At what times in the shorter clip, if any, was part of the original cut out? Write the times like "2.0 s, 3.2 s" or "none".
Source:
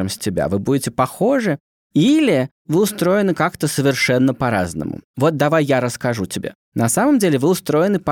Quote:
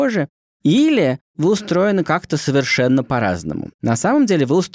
3.7 s